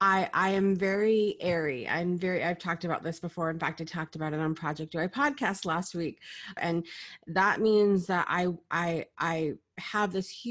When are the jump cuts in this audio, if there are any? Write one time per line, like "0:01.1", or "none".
0:06.6